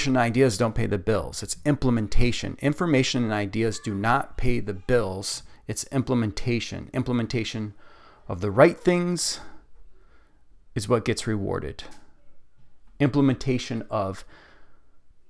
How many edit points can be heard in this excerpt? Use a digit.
0